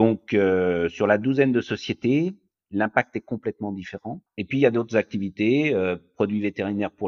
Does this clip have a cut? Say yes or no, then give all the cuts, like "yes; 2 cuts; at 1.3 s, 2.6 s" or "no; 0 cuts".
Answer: yes; 1 cut; at 4.3 s